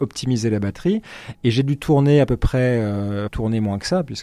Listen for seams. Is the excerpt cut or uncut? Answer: cut